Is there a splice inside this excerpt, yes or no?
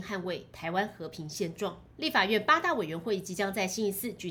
yes